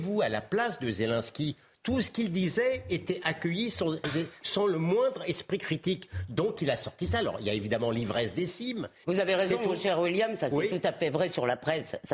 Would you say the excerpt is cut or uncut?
cut